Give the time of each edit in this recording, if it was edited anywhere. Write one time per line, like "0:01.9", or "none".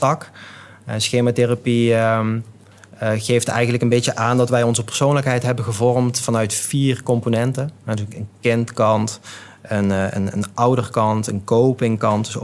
none